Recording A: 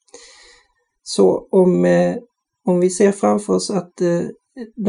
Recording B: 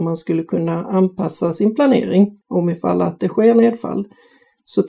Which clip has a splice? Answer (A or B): B